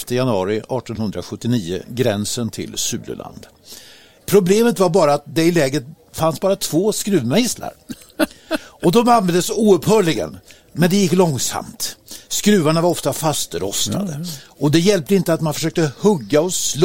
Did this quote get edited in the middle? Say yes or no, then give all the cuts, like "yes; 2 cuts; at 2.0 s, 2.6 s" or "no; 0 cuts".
yes; 1 cut; at 4.2 s